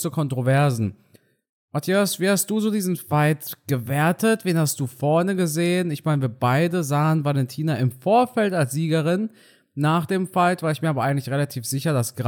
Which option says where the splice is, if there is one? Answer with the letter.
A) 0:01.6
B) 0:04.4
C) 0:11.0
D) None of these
D